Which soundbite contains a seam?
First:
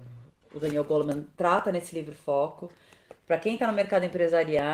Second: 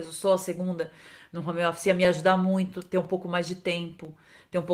first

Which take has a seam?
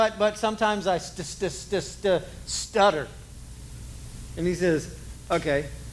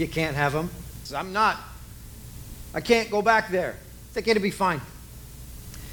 second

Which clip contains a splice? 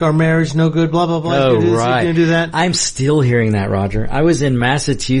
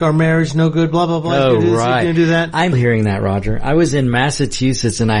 second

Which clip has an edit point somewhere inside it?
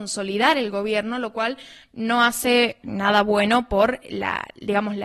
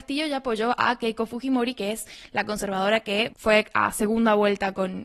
second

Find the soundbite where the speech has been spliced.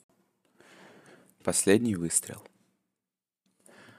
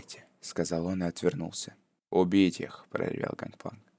second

